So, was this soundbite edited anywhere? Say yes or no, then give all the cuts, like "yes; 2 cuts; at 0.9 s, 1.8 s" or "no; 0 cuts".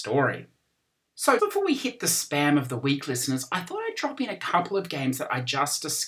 yes; 1 cut; at 1.4 s